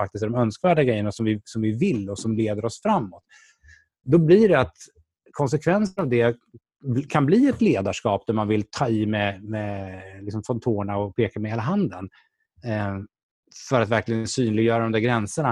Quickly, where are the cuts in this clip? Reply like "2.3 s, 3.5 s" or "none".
none